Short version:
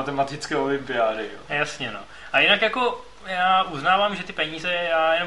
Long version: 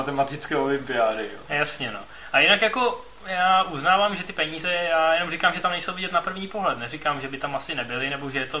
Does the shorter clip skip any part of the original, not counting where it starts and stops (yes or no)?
no